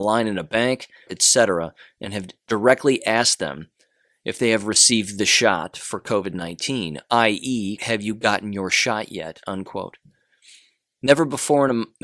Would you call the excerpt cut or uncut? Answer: cut